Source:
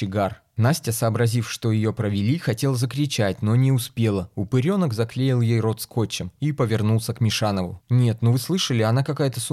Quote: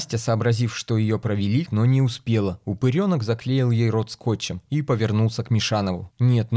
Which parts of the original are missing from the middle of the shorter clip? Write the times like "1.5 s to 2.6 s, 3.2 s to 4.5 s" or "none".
2.4 s to 3.4 s